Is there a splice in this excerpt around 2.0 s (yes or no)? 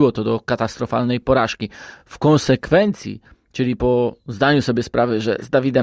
no